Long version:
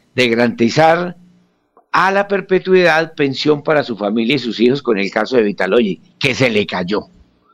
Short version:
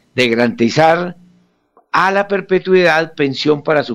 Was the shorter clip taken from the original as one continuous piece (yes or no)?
yes